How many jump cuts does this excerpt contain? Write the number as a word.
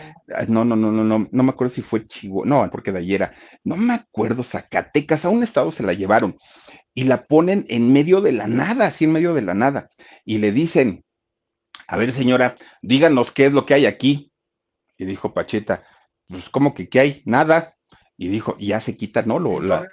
one